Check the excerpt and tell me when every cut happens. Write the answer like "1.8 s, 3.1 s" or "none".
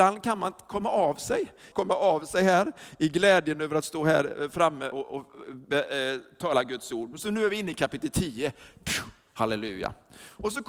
1.7 s, 4.9 s